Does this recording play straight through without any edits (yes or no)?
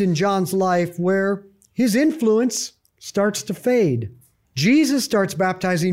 no